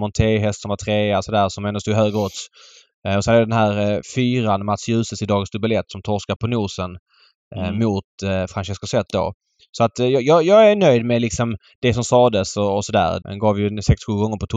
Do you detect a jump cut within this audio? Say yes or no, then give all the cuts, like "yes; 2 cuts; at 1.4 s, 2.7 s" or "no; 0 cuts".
yes; 2 cuts; at 6.4 s, 13.2 s